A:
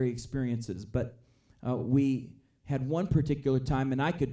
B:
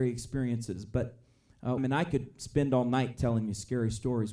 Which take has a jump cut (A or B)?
B